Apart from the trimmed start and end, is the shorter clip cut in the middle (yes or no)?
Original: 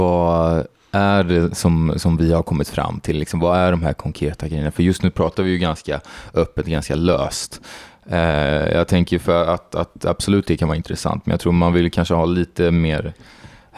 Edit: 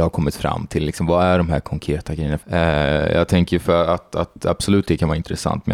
yes